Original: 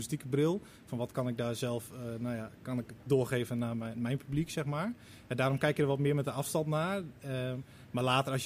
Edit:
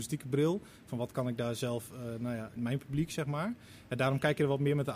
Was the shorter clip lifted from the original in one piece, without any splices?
no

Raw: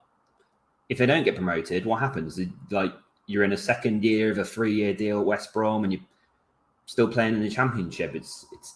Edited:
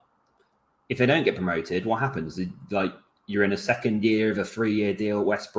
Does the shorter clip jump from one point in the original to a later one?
no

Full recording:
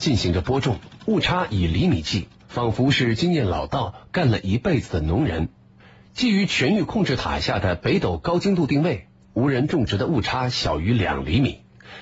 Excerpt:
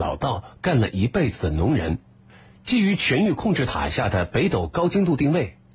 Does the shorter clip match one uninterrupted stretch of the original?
yes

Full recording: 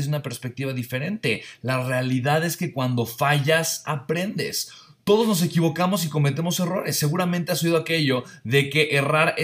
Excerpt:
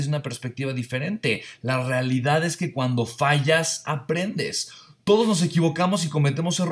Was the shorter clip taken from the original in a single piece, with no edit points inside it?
yes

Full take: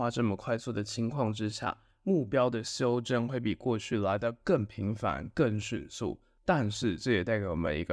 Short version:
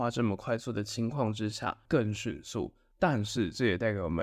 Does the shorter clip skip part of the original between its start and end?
yes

